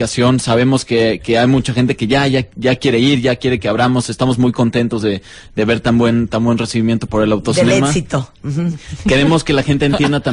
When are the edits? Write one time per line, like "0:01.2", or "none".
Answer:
none

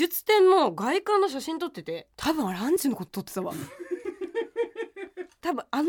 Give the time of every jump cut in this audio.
0:02.1

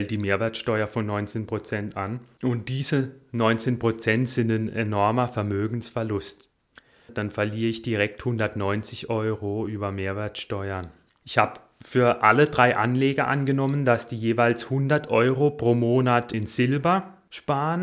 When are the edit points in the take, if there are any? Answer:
0:07.1
0:11.1
0:16.3

